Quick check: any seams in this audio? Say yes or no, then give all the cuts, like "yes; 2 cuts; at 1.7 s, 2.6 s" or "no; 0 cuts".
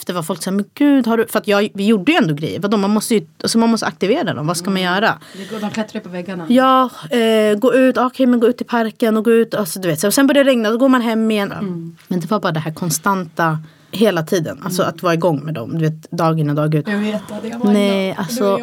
yes; 2 cuts; at 11.5 s, 16.8 s